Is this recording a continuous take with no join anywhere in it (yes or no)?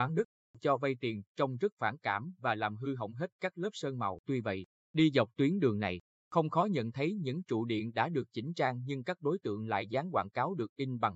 no